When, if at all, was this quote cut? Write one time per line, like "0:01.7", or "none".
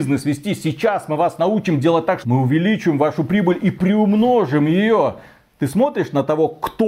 0:02.2

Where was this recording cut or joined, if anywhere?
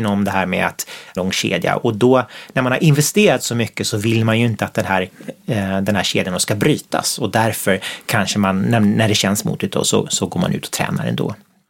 0:01.2

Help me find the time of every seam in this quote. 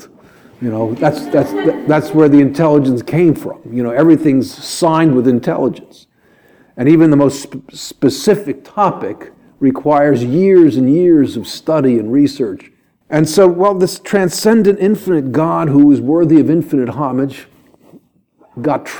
0:13.0

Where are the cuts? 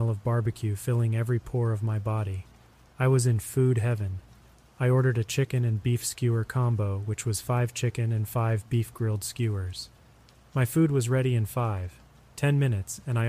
none

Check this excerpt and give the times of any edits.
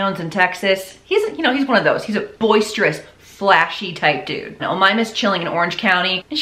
0:02.3
0:04.6

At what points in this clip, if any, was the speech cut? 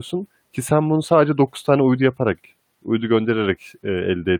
none

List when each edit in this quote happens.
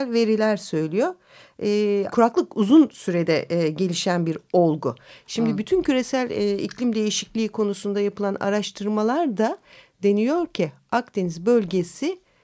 0:02.1

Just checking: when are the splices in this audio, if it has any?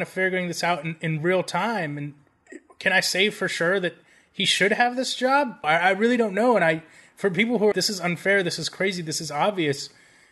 0:05.6
0:07.7

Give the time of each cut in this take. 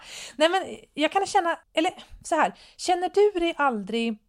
0:01.6

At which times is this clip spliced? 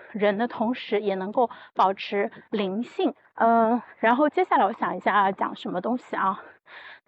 0:03.2

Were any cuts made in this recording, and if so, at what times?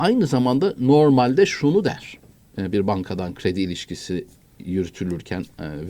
none

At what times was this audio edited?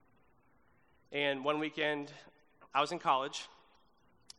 none

